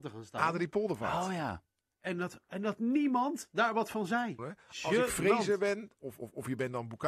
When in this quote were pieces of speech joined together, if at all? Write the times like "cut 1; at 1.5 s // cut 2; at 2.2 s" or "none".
cut 1; at 4.4 s // cut 2; at 6.0 s